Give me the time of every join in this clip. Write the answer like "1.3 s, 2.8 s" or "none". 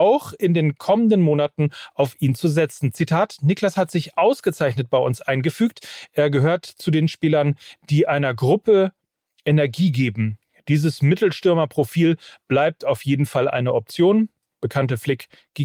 none